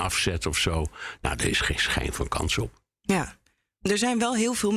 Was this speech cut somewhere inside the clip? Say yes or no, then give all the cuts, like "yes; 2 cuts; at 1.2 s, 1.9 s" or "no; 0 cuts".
no; 0 cuts